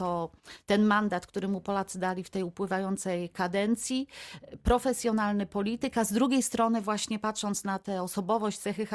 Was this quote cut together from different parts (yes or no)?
no